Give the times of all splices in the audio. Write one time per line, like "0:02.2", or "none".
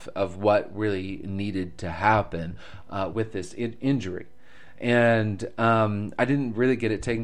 none